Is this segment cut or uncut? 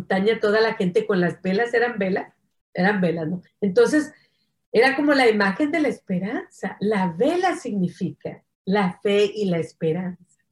cut